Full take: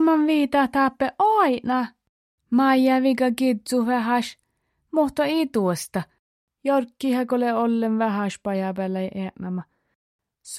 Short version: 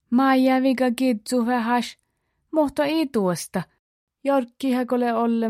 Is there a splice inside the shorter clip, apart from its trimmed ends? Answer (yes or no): no